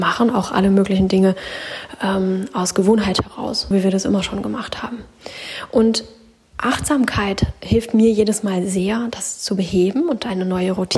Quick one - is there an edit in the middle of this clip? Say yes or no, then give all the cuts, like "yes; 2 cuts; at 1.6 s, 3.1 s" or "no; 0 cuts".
yes; 1 cut; at 3.7 s